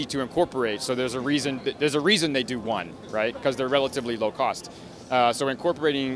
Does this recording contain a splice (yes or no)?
no